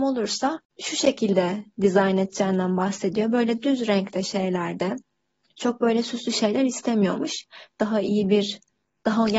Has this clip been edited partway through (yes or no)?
yes